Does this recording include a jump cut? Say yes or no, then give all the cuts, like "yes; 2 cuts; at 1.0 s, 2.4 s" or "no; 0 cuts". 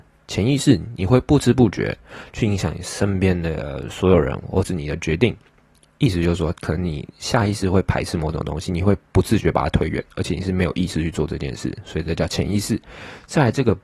no; 0 cuts